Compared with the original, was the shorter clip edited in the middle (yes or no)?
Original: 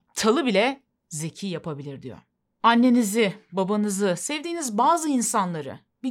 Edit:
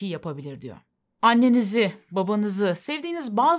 no